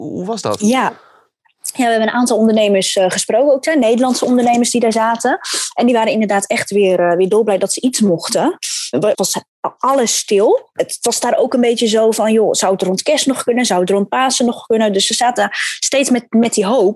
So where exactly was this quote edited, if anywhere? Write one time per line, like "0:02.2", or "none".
0:09.1